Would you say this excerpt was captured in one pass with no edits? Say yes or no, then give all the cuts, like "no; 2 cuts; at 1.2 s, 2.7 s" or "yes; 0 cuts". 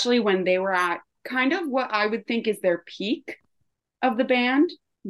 yes; 0 cuts